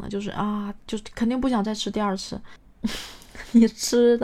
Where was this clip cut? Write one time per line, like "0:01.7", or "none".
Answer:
0:02.7

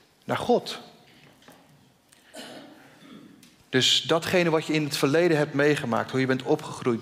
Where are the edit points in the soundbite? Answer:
0:03.6

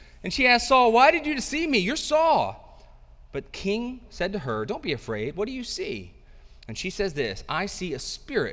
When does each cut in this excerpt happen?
none

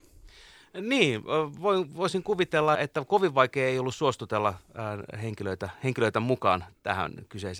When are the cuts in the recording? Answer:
0:02.8

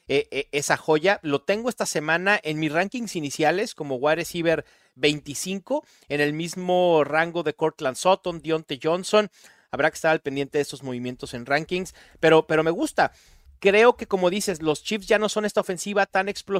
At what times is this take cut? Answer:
none

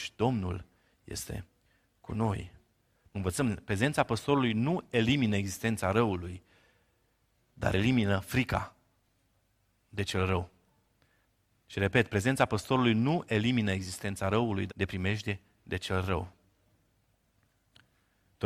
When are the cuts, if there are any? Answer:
0:03.1
0:14.7

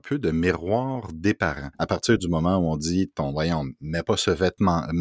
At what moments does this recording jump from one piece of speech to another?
0:01.7

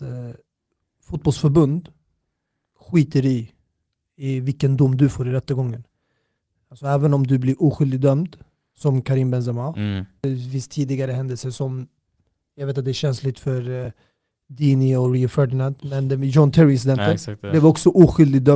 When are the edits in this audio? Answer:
none

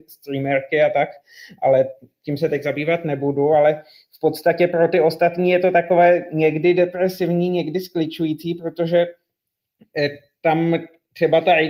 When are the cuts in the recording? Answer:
none

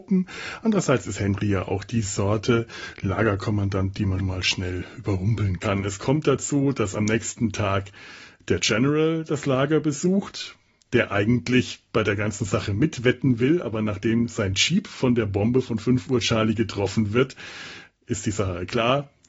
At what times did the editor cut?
0:04.2

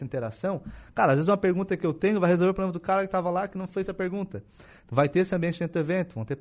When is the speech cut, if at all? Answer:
0:04.9

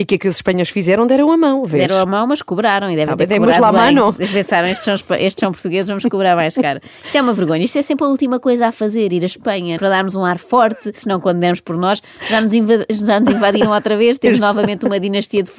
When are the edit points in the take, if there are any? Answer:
0:09.8
0:11.0

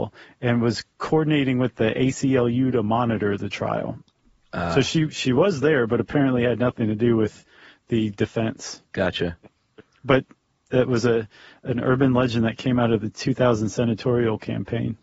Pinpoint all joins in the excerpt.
none

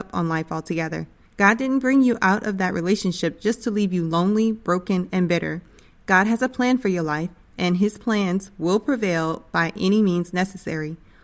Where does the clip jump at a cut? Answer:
0:01.3

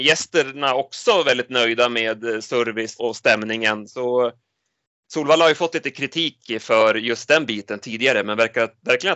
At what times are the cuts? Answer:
0:03.0

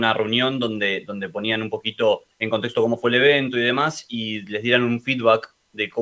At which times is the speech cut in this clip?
0:02.3

